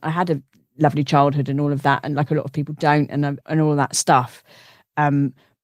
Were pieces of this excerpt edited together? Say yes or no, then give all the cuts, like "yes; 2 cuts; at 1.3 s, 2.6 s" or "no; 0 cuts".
yes; 1 cut; at 3.4 s